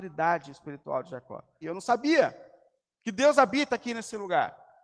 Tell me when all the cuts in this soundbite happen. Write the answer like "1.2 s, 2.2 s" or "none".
1.6 s